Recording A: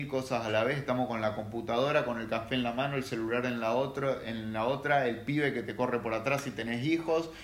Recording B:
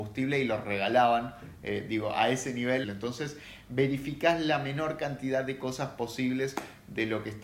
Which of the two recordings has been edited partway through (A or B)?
B